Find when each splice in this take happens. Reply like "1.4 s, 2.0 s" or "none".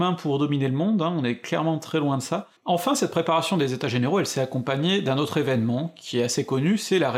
2.6 s